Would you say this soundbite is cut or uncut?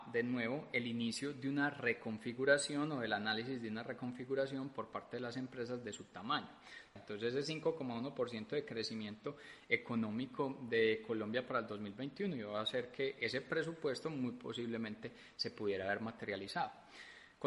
cut